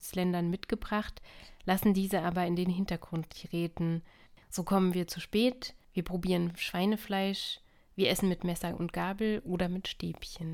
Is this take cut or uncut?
cut